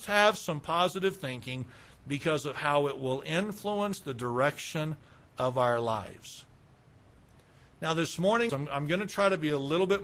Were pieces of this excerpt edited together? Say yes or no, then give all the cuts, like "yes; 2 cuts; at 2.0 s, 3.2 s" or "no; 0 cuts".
yes; 1 cut; at 8.5 s